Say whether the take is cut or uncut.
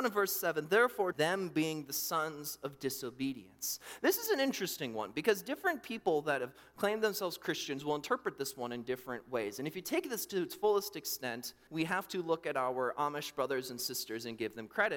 cut